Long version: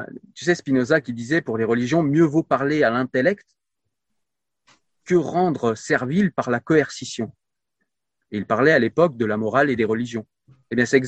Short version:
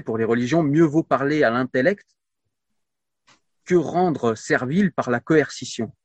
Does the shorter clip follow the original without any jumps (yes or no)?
yes